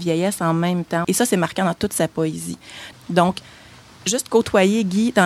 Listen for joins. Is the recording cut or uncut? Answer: cut